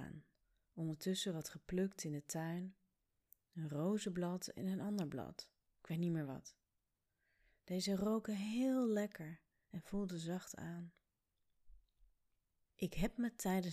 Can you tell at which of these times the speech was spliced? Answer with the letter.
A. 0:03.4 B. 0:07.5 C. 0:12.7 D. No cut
C